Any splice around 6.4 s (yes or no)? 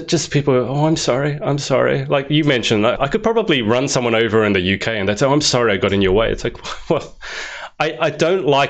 no